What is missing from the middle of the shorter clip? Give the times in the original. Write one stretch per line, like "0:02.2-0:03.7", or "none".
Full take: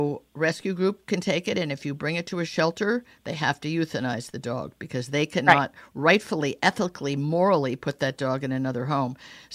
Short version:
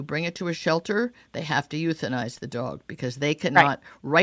none